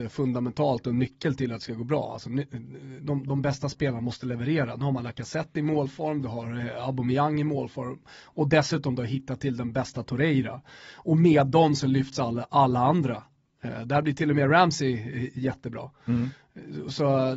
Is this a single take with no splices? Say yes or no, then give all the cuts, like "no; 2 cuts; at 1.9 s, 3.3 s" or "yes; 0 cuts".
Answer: yes; 0 cuts